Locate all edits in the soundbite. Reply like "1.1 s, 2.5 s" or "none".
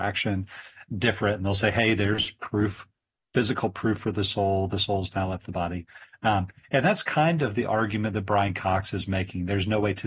none